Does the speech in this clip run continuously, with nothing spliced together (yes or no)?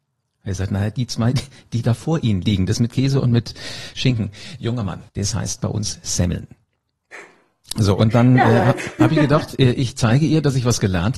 no